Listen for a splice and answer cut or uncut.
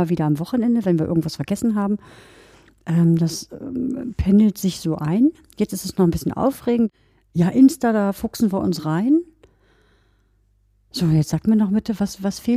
uncut